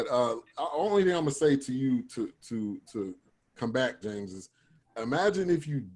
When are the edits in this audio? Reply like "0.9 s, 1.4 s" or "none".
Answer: 4.0 s